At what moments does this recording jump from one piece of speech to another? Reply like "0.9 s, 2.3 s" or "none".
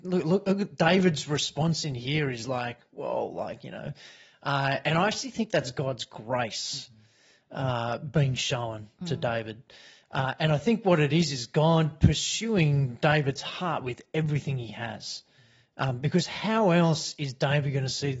none